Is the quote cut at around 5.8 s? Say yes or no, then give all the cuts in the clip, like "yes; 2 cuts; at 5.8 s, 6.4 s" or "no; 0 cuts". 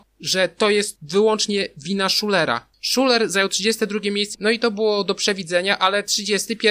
no; 2 cuts; at 2.7 s, 4.3 s